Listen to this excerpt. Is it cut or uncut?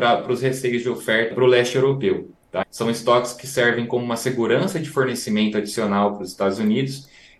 cut